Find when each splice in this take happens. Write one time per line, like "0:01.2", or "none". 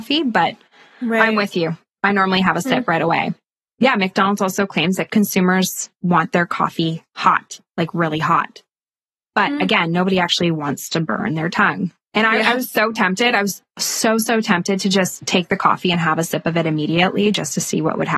none